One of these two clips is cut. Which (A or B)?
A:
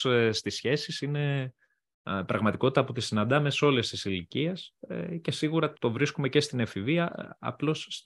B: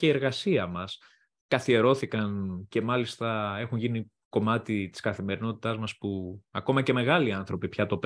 A